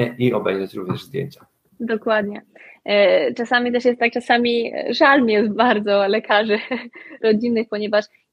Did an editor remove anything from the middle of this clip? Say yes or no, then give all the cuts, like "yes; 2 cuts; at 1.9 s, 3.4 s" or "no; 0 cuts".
no; 0 cuts